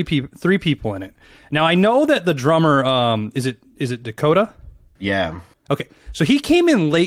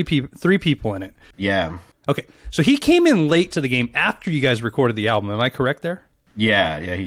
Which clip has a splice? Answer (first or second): second